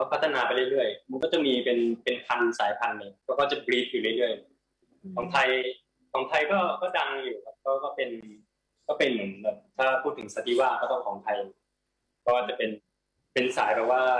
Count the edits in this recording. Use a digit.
0